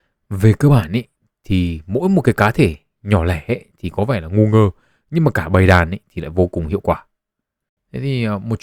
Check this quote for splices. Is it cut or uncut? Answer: uncut